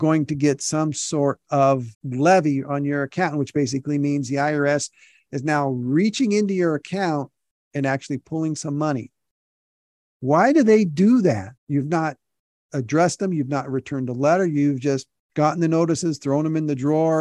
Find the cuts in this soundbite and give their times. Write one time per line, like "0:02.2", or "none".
0:01.9
0:11.6